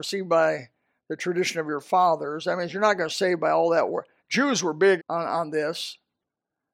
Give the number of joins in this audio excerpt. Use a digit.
1